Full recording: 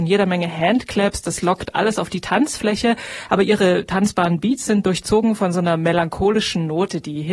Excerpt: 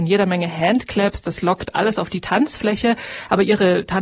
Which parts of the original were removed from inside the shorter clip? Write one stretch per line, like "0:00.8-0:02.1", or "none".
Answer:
none